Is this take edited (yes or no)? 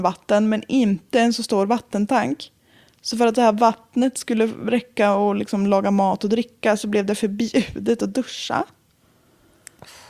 no